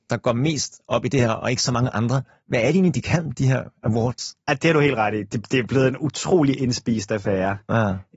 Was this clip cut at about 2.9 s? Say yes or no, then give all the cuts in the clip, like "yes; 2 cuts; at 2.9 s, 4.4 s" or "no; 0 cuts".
no; 1 cut; at 4.4 s